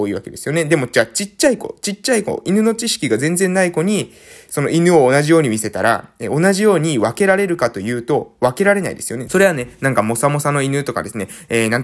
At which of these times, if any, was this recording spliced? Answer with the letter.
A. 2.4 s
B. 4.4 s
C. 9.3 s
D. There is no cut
C